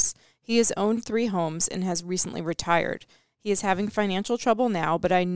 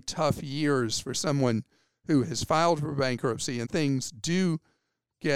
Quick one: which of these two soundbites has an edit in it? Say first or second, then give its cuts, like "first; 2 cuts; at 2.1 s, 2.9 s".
second; 1 cut; at 3.6 s